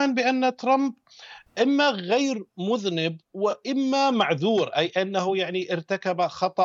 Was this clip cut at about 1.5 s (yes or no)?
yes